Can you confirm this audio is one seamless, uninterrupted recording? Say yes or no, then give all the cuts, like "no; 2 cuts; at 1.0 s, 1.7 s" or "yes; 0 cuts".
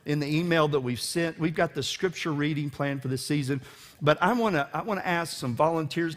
yes; 0 cuts